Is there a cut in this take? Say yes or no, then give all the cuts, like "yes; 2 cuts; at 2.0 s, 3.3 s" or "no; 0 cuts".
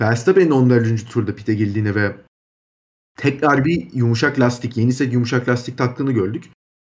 no; 0 cuts